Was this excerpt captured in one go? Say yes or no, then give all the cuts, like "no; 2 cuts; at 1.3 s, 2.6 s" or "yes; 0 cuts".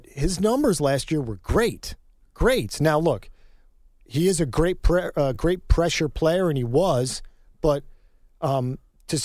yes; 0 cuts